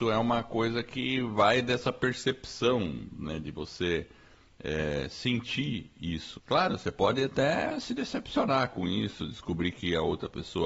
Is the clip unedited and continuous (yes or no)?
no